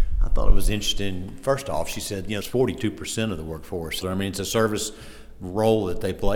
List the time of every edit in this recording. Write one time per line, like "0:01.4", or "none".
0:02.4
0:04.0